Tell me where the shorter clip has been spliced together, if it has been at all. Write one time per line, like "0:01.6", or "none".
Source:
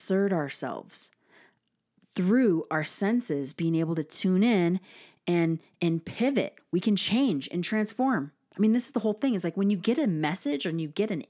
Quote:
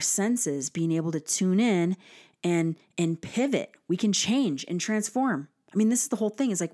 none